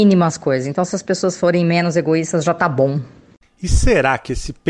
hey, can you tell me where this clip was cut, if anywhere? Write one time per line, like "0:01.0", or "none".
none